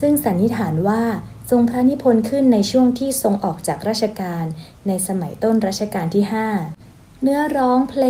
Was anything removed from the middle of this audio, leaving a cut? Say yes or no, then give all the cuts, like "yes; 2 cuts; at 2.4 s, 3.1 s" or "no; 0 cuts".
no; 0 cuts